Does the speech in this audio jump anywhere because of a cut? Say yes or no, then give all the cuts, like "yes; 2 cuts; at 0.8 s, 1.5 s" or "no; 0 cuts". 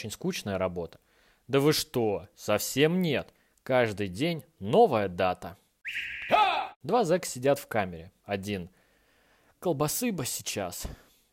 no; 0 cuts